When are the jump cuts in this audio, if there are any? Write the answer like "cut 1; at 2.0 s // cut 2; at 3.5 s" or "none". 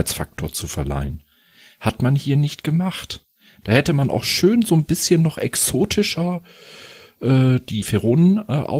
cut 1; at 7.8 s